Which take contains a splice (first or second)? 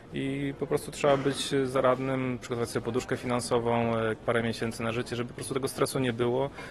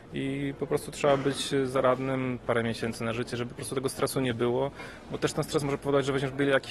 second